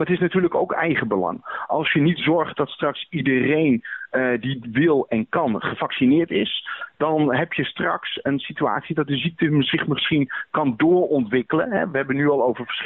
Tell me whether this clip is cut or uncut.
uncut